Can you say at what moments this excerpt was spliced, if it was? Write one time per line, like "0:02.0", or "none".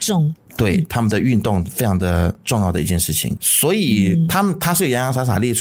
0:03.4